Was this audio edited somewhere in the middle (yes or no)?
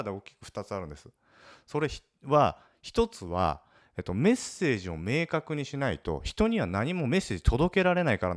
no